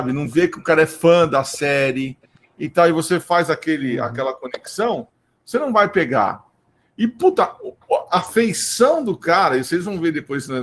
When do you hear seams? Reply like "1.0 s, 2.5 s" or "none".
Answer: none